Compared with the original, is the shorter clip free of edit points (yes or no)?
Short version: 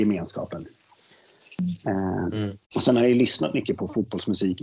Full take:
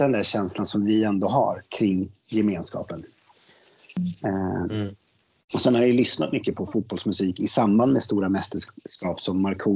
no